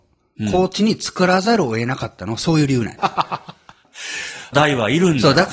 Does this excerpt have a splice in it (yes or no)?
yes